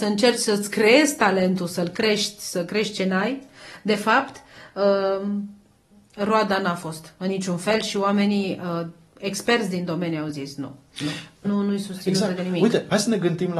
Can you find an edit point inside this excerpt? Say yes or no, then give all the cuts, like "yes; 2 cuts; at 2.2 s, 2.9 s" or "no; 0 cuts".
yes; 1 cut; at 11.4 s